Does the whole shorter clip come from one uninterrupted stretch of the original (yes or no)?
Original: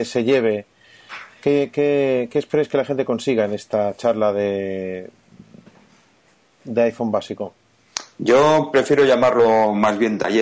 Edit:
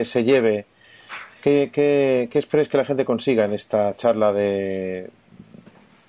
yes